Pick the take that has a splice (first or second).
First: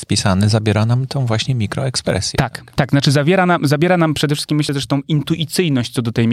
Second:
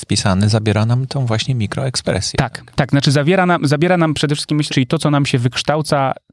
second